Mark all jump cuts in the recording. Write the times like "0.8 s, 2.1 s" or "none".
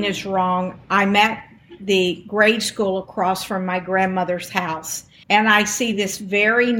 5.2 s